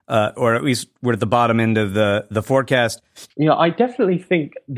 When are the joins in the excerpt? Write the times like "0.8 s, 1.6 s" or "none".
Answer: 3.3 s